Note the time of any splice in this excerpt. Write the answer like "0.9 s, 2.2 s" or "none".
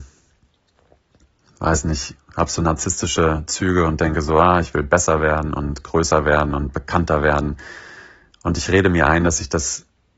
none

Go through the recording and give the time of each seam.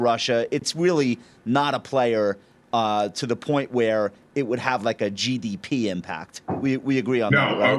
none

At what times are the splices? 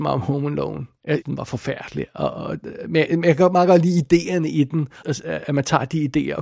1.2 s, 5.0 s

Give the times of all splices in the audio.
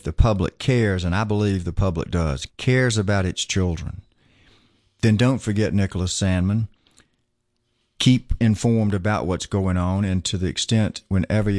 2.5 s

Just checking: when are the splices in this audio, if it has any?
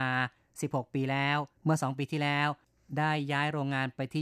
1.6 s

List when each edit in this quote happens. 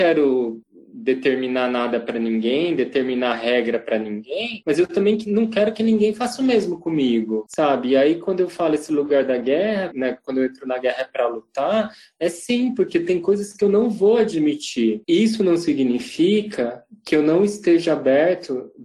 9.9 s

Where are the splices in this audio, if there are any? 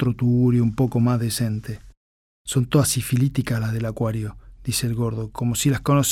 none

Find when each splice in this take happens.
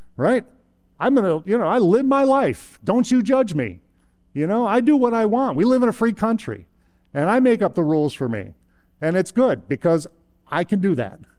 none

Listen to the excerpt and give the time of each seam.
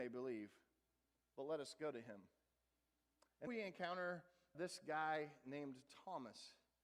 3.5 s, 4.5 s

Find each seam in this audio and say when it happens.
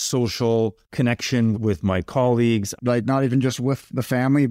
1.5 s, 2.8 s

